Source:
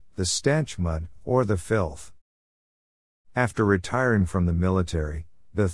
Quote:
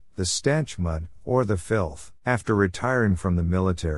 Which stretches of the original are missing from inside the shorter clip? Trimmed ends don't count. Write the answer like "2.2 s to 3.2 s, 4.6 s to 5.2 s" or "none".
2.2 s to 3.3 s